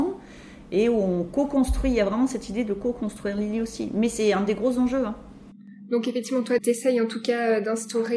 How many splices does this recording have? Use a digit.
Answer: 1